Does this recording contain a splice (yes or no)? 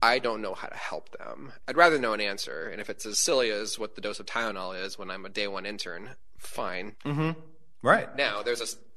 yes